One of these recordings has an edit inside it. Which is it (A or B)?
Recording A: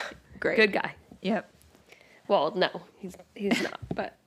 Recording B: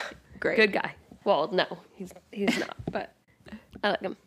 B